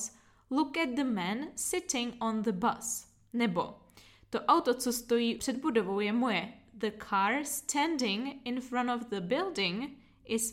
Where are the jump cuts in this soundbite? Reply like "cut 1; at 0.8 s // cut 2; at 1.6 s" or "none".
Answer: cut 1; at 5.4 s